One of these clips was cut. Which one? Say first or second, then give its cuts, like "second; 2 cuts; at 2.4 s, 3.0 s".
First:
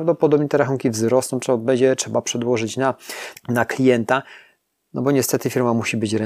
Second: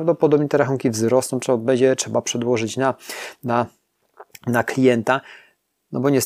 first; 1 cut; at 3.3 s